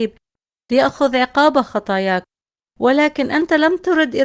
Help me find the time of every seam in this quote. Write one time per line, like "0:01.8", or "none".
none